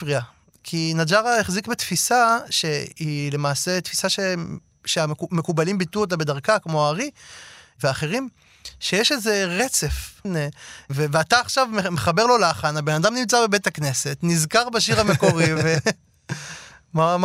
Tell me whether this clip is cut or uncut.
cut